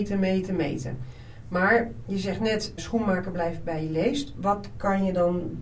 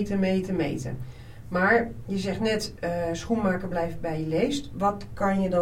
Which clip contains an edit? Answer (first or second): first